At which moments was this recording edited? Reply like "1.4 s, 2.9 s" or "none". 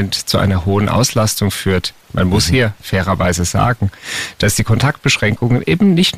none